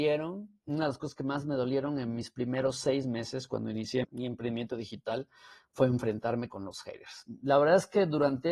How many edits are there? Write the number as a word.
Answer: one